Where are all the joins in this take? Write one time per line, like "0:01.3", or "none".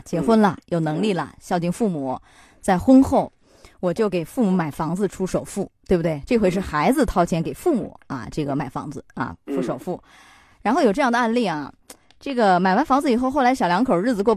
none